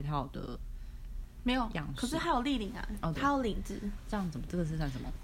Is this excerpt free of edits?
no; 1 cut; at 3.2 s

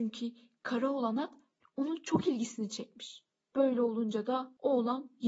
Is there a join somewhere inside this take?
no; 0 cuts

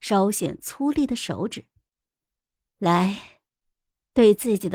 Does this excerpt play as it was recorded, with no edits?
no; 1 cut; at 2.6 s

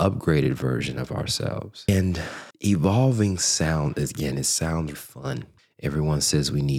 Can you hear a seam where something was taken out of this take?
yes; 2 cuts; at 2.5 s, 4.9 s

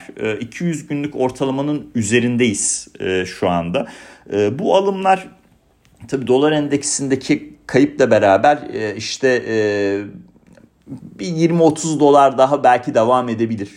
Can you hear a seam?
no; 0 cuts

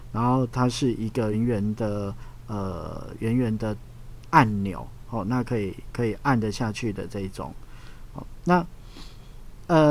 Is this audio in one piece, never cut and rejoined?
no; 1 cut; at 1.3 s

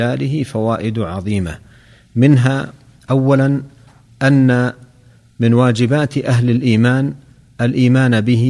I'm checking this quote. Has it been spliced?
no; 0 cuts

